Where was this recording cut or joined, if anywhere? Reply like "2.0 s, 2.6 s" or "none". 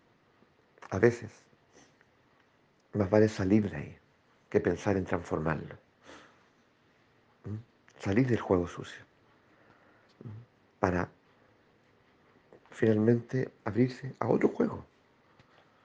none